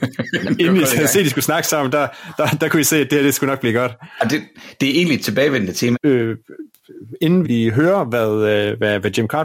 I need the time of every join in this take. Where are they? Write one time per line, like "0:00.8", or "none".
0:05.9
0:07.4